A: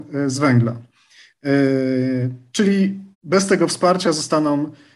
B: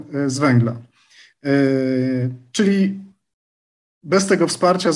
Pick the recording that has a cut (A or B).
A